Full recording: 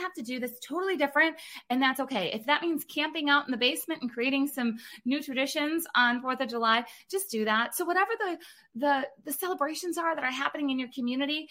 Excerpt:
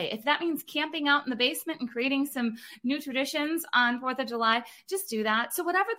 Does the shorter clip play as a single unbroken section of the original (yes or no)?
yes